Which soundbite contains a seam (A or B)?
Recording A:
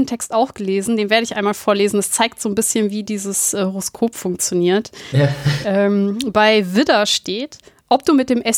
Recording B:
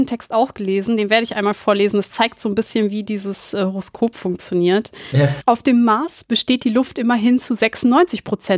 B